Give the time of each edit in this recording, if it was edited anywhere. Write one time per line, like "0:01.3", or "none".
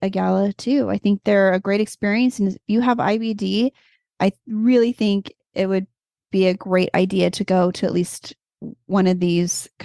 none